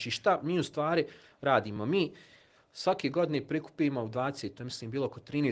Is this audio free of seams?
yes; 0 cuts

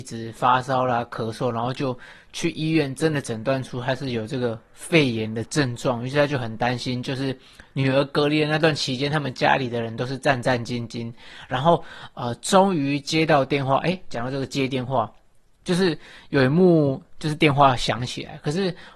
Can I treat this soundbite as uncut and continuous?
yes; 0 cuts

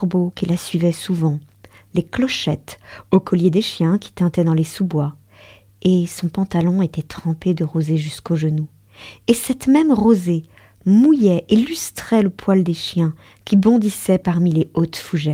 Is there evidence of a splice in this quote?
no; 0 cuts

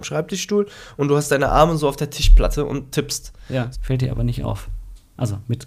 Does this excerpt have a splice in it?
yes; 1 cut; at 3.7 s

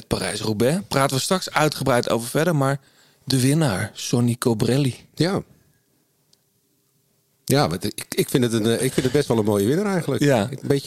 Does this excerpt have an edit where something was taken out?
no; 0 cuts

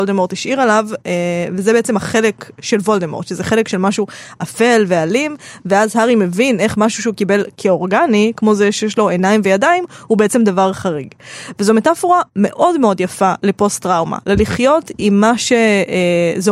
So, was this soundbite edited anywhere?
no; 0 cuts

